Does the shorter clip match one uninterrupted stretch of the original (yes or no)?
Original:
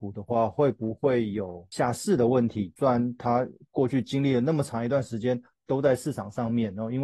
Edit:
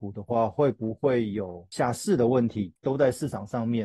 no